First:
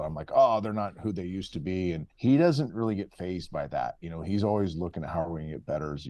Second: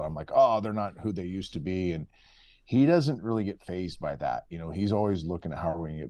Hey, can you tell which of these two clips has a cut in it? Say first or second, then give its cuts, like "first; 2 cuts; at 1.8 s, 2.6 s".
first; 1 cut; at 2.1 s